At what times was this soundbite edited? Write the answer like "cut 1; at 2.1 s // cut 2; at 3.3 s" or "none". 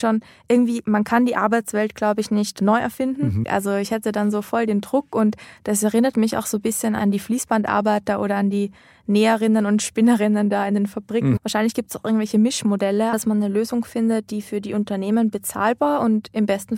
cut 1; at 3.4 s // cut 2; at 11.4 s // cut 3; at 13.1 s